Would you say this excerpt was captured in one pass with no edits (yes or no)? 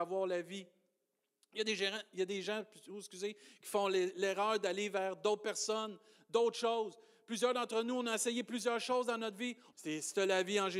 no